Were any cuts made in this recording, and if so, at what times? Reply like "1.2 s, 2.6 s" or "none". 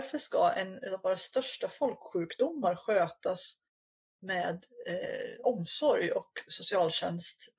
none